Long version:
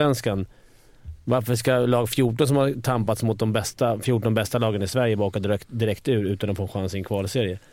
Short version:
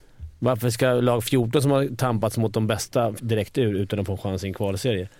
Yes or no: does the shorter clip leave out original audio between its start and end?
yes